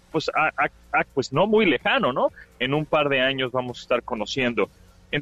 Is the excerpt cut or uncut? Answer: cut